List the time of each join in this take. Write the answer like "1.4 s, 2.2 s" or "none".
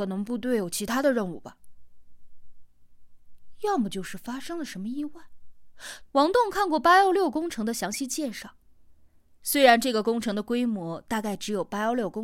6.1 s

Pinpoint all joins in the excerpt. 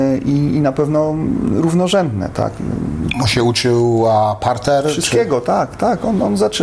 none

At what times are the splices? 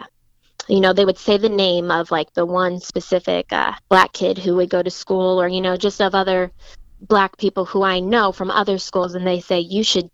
3.8 s

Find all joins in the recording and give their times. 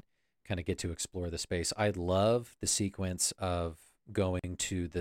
none

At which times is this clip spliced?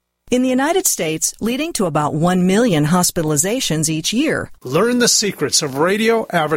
1.4 s, 4.5 s

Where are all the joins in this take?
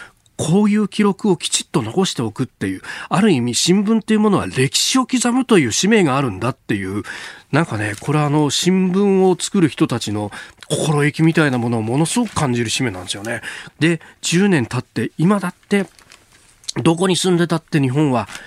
13.7 s

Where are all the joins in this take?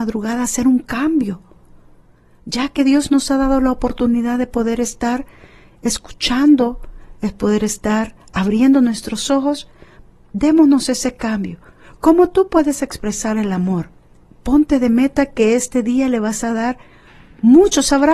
none

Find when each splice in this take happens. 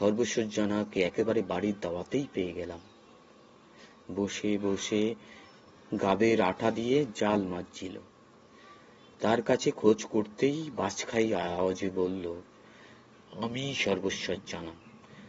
none

